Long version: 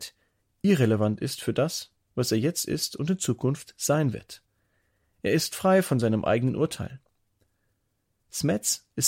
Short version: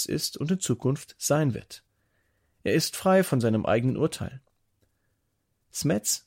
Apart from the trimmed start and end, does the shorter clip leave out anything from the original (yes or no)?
no